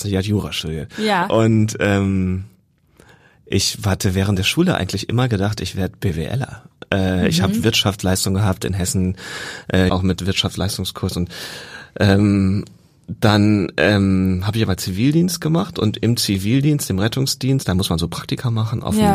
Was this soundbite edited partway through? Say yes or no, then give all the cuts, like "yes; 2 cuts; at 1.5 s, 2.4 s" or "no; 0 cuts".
yes; 1 cut; at 9.9 s